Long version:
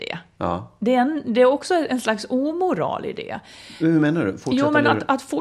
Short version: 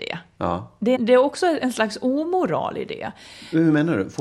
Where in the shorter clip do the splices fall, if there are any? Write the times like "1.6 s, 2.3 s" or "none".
0.9 s